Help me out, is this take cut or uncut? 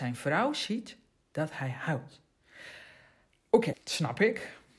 cut